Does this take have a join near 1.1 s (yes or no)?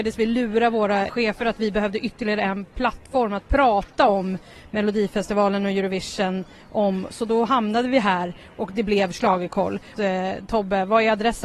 yes